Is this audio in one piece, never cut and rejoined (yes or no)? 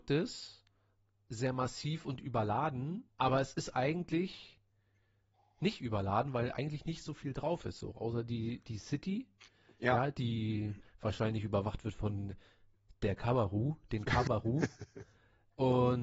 no